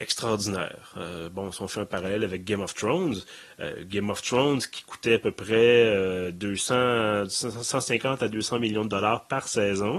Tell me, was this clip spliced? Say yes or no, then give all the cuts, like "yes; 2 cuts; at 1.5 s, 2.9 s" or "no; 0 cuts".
no; 0 cuts